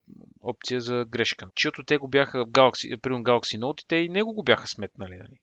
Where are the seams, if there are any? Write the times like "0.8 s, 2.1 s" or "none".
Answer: 1.5 s